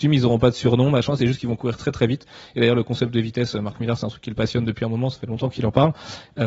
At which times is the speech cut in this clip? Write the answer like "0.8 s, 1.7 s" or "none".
none